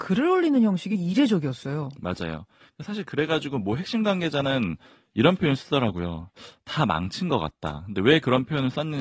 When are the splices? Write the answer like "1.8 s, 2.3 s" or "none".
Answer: none